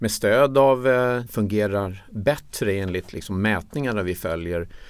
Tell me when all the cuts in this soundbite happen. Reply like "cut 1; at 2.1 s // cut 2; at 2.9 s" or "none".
cut 1; at 1.3 s